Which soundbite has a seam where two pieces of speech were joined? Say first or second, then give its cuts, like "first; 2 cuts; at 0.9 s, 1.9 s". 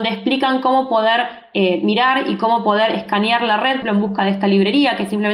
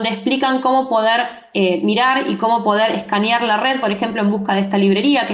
first; 1 cut; at 3.8 s